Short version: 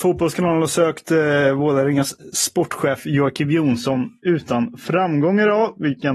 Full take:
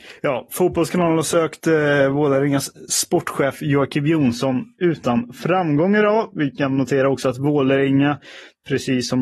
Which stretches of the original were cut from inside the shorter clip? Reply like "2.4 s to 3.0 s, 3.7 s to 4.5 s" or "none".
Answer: none